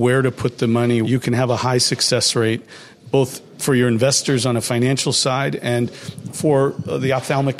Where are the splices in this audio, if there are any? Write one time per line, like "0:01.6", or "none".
0:01.0